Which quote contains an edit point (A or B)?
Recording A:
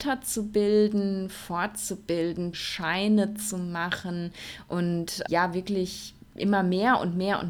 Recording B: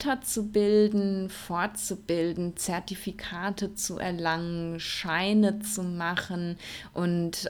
A